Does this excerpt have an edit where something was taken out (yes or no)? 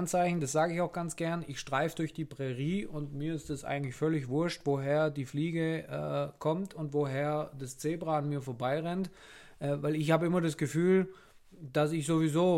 no